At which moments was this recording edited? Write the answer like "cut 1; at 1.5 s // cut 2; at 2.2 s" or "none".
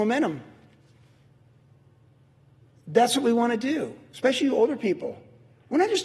none